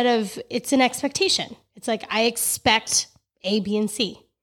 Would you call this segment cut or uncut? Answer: uncut